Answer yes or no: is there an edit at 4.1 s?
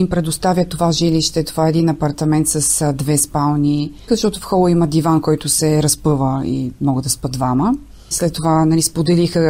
yes